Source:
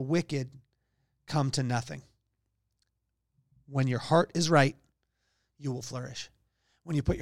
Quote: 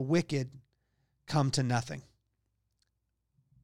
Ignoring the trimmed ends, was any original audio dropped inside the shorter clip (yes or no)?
no